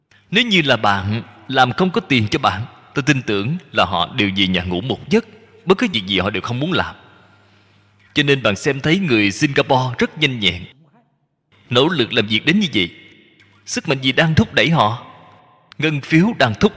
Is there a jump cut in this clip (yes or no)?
no